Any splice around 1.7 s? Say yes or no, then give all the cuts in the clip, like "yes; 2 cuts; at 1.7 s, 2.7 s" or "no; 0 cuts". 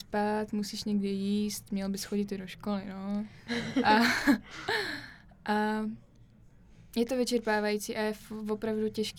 no; 0 cuts